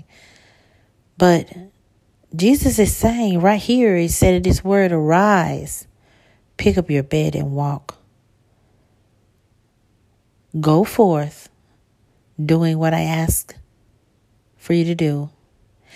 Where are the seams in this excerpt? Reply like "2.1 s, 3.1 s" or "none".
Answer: none